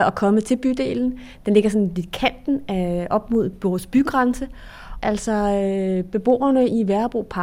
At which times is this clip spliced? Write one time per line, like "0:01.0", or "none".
0:05.0